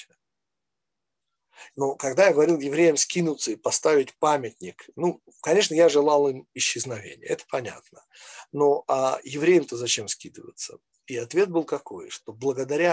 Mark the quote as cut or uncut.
cut